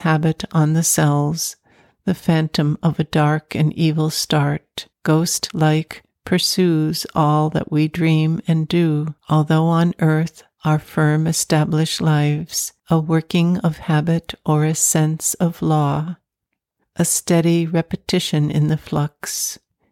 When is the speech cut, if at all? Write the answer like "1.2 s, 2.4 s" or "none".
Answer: 4.9 s, 9.2 s, 12.8 s